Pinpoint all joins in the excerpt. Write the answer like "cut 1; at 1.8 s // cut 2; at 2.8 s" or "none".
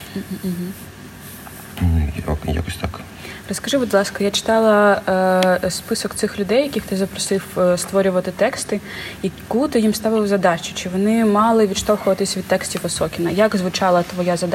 none